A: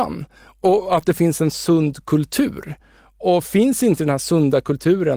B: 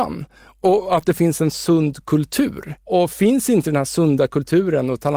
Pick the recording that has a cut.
B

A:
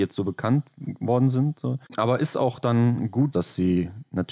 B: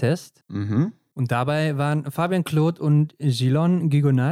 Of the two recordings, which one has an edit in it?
A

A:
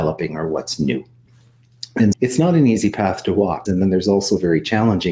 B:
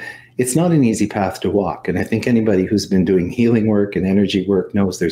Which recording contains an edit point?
A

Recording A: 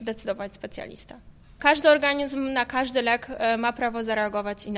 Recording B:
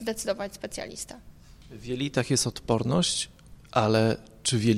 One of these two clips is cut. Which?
A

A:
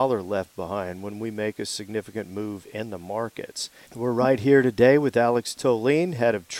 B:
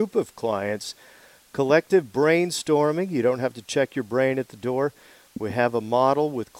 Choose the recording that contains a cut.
A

